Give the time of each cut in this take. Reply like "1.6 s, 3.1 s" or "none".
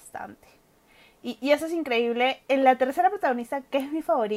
none